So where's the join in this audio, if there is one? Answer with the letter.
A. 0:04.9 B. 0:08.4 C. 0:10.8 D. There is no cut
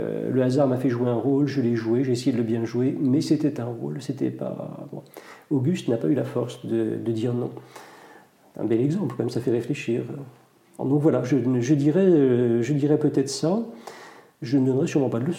C